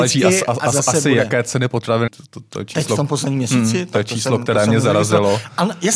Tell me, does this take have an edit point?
yes; 1 cut; at 2.1 s

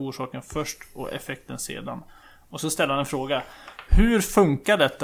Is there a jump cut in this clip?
no; 0 cuts

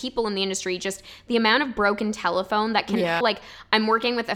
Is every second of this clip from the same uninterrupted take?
no; 1 cut; at 3.2 s

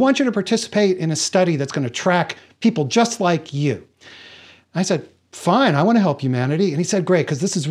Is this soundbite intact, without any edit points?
yes; 0 cuts

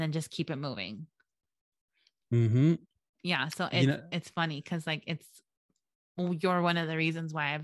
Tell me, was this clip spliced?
no; 0 cuts

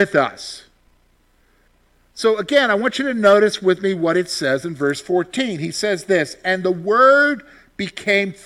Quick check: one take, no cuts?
yes; 0 cuts

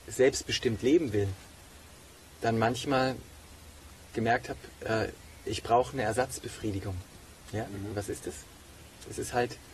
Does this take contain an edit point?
no; 0 cuts

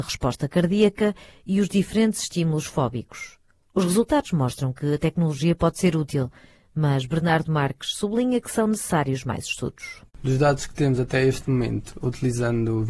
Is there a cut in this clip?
no; 0 cuts

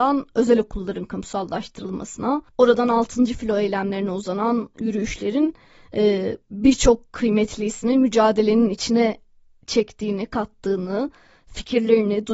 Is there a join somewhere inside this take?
yes; 1 cut; at 2.5 s

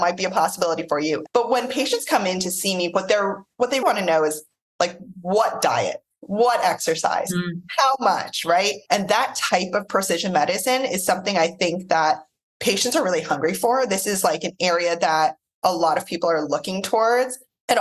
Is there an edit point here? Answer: yes; 3 cuts; at 1.3 s, 3.8 s, 8.9 s

